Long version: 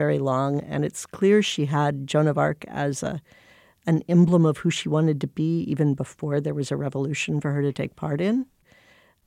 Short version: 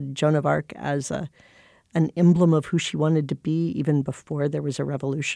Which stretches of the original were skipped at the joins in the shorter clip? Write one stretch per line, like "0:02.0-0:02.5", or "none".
none